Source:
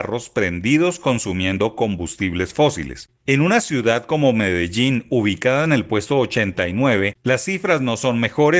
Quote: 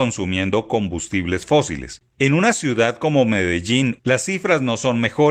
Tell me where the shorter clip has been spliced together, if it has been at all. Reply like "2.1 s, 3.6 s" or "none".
4.0 s